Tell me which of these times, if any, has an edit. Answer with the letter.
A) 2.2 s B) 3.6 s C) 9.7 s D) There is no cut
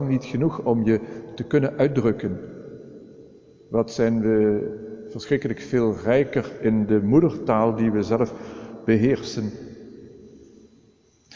D